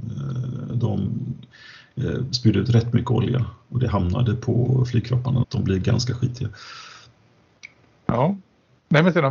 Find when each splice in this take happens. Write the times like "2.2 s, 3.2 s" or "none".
5.4 s